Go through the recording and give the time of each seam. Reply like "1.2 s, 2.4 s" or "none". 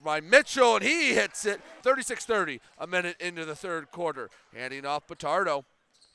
1.8 s